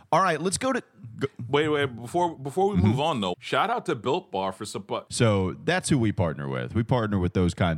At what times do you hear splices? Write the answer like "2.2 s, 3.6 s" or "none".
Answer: 3.3 s, 5.1 s